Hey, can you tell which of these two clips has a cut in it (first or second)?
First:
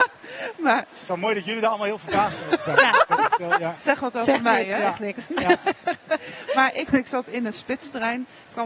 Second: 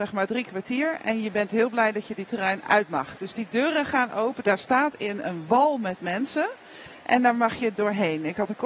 first